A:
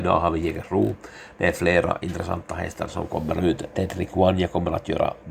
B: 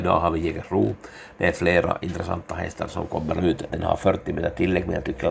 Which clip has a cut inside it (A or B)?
B